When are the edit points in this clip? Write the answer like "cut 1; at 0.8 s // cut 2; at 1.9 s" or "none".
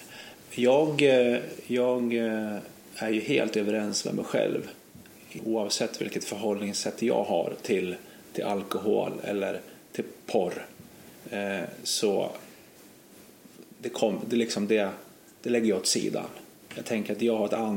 cut 1; at 5.4 s